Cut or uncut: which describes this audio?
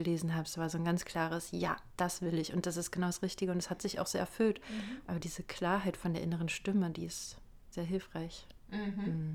cut